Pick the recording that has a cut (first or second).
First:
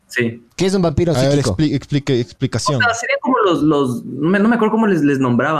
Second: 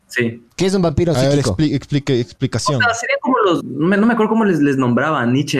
second